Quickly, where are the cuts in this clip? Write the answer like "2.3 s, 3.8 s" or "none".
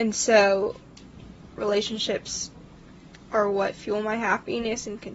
1.5 s